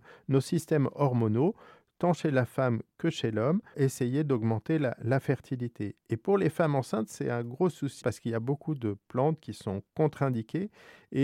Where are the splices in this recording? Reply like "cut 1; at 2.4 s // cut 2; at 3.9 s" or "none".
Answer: cut 1; at 3.7 s // cut 2; at 8.0 s